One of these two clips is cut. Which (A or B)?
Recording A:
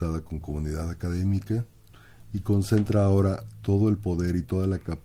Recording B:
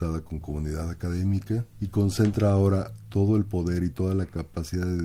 B